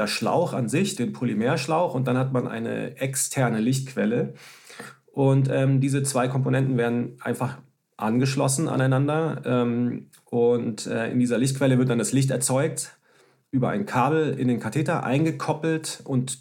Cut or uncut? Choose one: uncut